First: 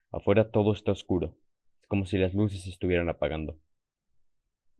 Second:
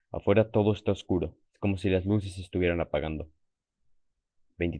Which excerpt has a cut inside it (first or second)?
second